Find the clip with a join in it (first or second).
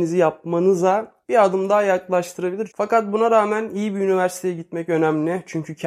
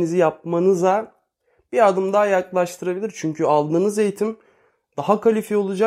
first